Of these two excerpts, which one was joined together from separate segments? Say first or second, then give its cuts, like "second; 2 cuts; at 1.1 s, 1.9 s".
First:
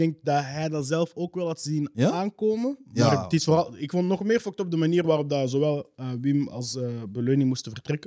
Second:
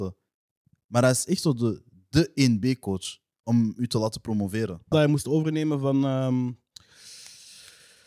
second; 1 cut; at 4.9 s